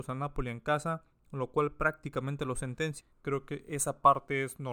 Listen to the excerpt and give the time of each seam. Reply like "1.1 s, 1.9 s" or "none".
3.0 s